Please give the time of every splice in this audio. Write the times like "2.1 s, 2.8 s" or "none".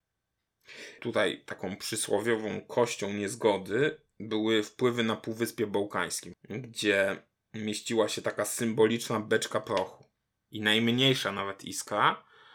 1.0 s, 6.3 s